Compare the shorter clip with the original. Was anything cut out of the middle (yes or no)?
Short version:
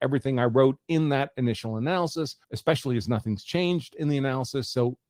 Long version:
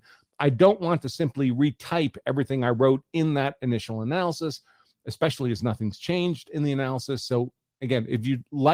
yes